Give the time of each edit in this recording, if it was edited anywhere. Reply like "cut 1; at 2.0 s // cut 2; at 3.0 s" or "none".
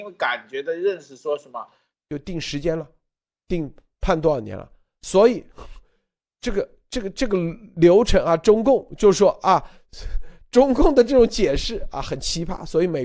cut 1; at 1.9 s